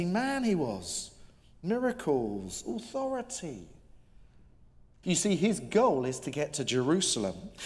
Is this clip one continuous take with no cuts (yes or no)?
no